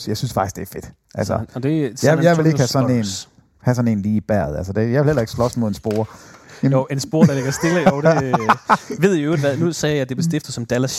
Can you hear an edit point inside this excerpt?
no; 0 cuts

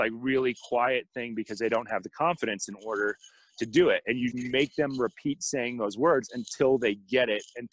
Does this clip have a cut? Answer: yes; 1 cut; at 4.3 s

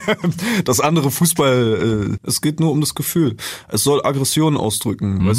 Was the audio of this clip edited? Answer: yes; 1 cut; at 2.2 s

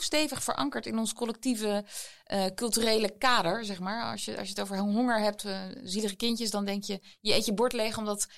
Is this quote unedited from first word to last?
yes; 0 cuts

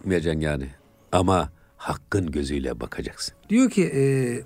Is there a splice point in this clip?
yes; 1 cut; at 3.4 s

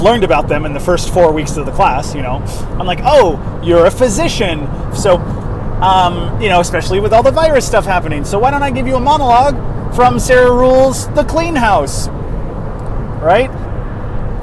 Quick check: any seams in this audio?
yes; 2 cuts; at 4.9 s, 12.1 s

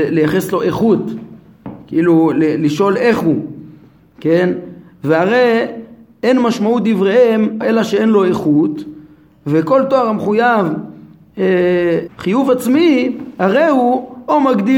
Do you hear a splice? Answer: yes; 2 cuts; at 7.6 s, 12.1 s

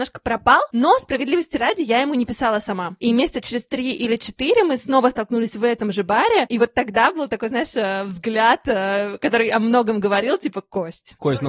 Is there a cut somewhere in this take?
no; 0 cuts

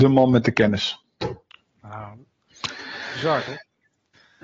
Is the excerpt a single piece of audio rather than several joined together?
yes; 0 cuts

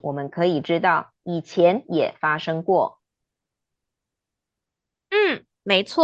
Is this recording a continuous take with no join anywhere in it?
yes; 0 cuts

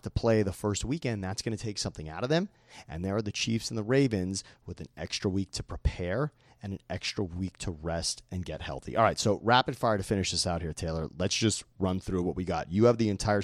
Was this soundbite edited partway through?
no; 0 cuts

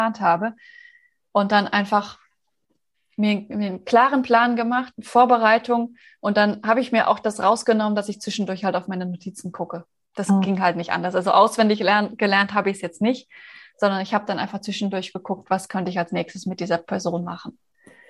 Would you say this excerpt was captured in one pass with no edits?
yes; 0 cuts

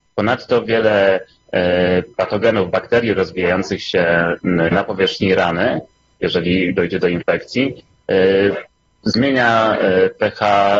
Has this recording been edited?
no; 0 cuts

